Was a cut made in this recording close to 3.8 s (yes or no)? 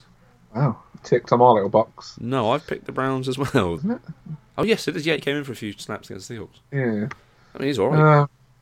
yes